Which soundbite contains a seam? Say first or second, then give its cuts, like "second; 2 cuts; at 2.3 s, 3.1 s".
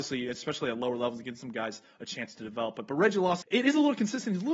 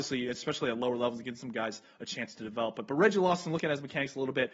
first; 1 cut; at 3.4 s